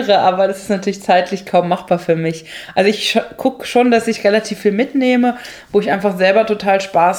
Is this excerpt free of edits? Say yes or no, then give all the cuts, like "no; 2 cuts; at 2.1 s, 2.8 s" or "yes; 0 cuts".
yes; 0 cuts